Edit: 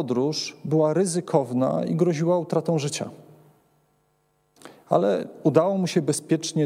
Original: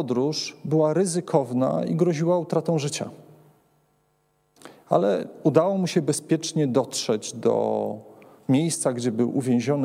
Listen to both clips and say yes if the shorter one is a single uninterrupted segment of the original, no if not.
yes